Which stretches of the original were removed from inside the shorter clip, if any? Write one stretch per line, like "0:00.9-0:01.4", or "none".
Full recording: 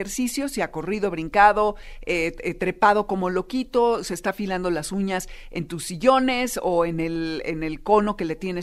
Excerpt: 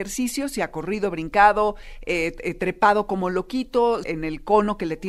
0:04.0-0:07.4